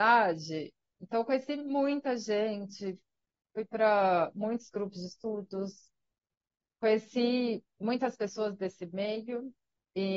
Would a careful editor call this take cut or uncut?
uncut